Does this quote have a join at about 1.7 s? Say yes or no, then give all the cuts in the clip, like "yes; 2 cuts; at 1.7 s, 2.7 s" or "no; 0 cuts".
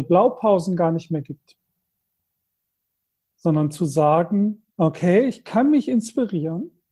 no; 1 cut; at 4.7 s